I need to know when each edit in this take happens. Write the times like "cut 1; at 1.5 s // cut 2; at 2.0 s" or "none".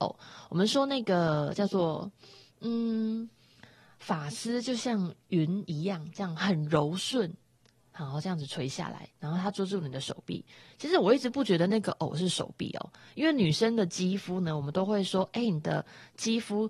none

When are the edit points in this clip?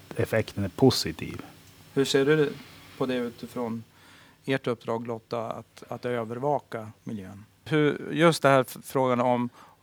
none

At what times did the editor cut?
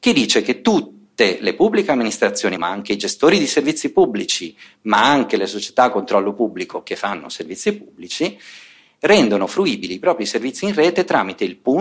cut 1; at 2.6 s

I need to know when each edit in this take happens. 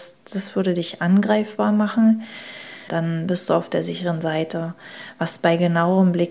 cut 1; at 2.9 s

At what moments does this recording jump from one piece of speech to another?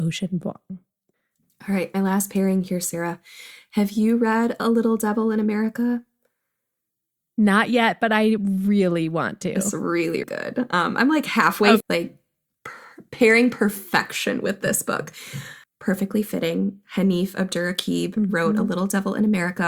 cut 1; at 10.2 s // cut 2; at 11.8 s // cut 3; at 15.6 s

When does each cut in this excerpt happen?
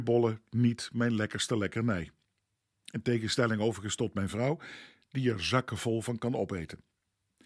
none

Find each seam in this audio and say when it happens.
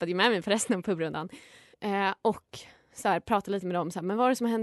cut 1; at 1.7 s

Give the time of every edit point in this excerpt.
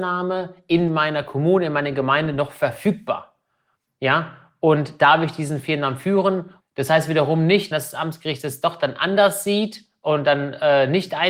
cut 1; at 6.6 s // cut 2; at 7.7 s

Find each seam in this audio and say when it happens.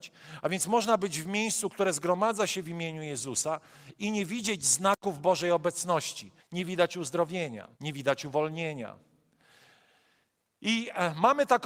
cut 1; at 6.4 s // cut 2; at 7.7 s

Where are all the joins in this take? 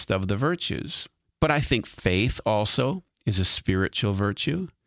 cut 1; at 1.3 s

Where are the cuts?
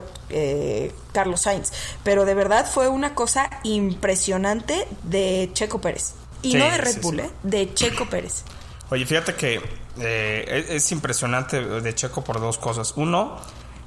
none

